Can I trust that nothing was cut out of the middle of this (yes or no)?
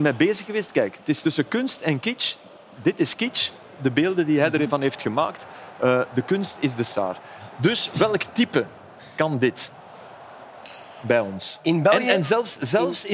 yes